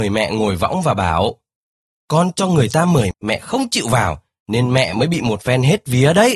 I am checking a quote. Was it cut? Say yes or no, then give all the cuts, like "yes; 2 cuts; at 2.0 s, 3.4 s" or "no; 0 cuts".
yes; 1 cut; at 3.1 s